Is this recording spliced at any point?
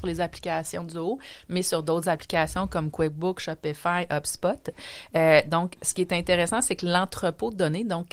no; 0 cuts

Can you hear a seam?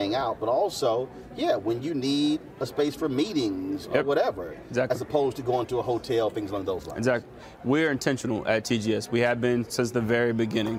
no; 0 cuts

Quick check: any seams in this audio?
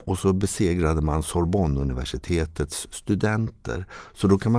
no; 0 cuts

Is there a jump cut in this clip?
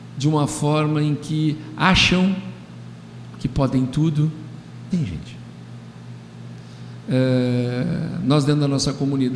yes; 2 cuts; at 3.3 s, 4.9 s

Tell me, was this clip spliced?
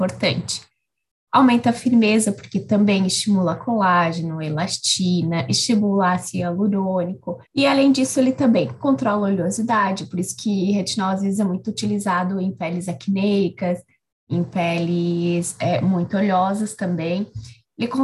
yes; 1 cut; at 7.5 s

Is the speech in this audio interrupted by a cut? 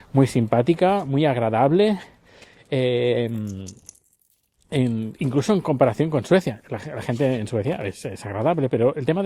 no; 0 cuts

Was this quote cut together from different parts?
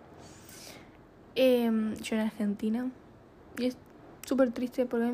no; 0 cuts

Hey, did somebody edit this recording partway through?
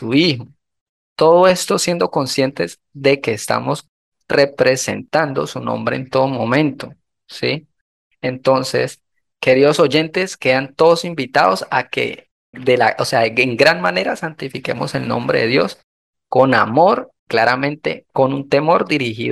yes; 2 cuts; at 12.5 s, 17.2 s

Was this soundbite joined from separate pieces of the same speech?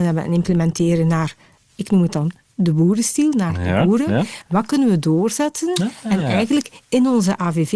no; 0 cuts

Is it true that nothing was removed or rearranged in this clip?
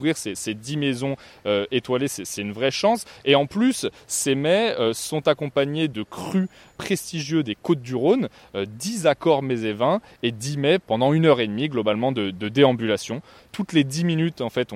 yes; 0 cuts

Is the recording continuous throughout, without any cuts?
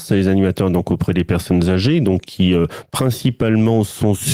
yes; 0 cuts

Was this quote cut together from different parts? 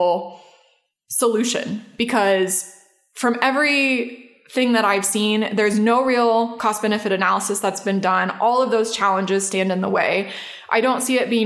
no; 0 cuts

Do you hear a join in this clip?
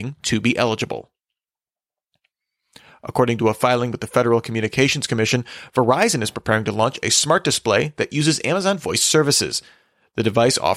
no; 0 cuts

